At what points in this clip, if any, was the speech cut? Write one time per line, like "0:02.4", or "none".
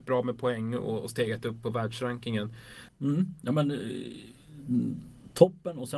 0:02.9